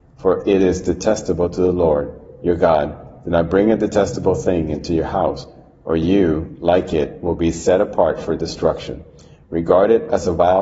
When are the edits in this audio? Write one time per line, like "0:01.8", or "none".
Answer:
none